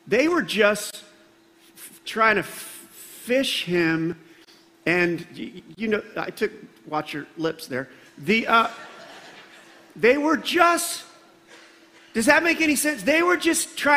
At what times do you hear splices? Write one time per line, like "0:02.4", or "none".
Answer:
none